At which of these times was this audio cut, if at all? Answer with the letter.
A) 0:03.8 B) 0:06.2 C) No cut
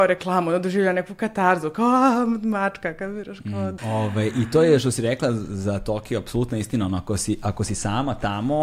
A